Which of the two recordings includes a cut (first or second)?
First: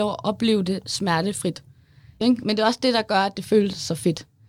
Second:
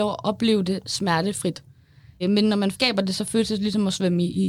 first